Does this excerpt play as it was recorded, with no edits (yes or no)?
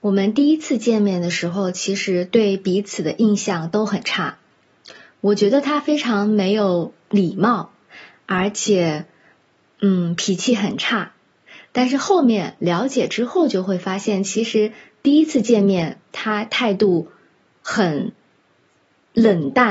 yes